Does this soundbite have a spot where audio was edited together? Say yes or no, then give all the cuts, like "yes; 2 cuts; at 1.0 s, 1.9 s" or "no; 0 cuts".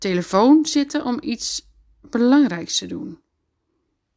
no; 0 cuts